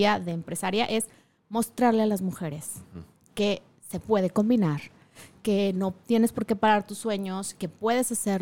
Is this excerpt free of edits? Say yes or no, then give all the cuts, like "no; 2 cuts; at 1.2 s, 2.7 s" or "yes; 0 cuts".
yes; 0 cuts